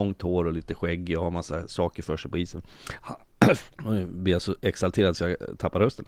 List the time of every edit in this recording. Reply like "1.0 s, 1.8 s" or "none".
3.7 s